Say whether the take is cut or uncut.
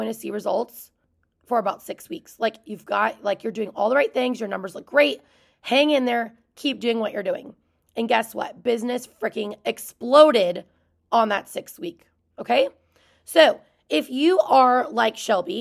uncut